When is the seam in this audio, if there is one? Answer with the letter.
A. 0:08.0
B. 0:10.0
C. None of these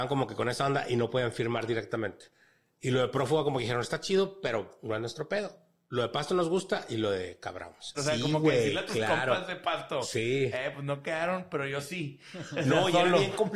A